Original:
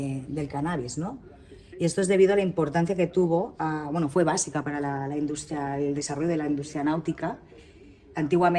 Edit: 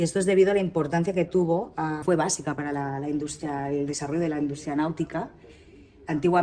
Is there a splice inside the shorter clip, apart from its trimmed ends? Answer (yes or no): yes